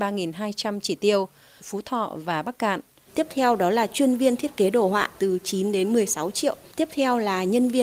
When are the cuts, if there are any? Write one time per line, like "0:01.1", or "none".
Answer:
0:01.6
0:03.1